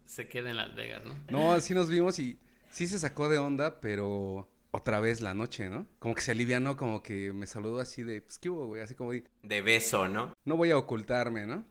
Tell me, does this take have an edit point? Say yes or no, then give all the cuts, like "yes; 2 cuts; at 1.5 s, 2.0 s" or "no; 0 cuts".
yes; 3 cuts; at 1.3 s, 5.9 s, 10.3 s